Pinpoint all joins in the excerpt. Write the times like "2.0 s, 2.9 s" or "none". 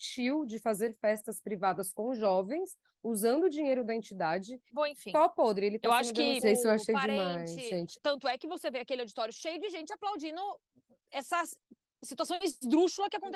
4.7 s, 6.4 s, 8.0 s